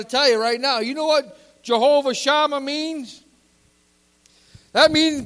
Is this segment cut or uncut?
uncut